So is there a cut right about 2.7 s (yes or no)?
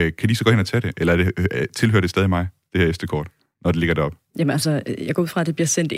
no